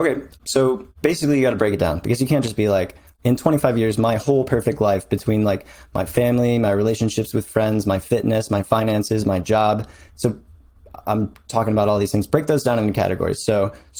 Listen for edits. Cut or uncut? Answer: uncut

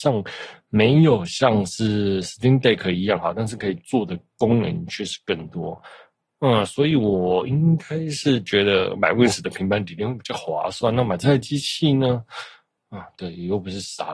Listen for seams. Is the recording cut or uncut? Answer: uncut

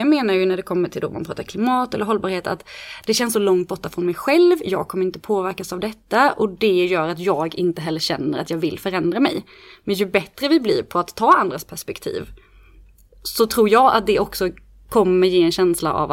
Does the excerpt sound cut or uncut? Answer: uncut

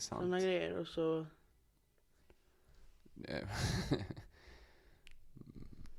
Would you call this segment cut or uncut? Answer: cut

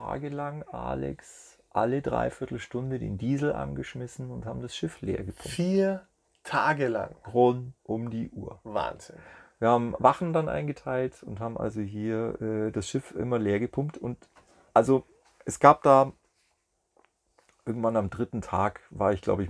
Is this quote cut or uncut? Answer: cut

